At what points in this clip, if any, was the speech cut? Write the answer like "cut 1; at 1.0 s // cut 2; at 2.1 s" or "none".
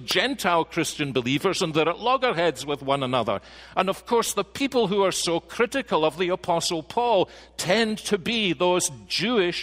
none